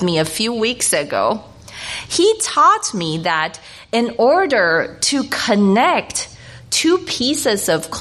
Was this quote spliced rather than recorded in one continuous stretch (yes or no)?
no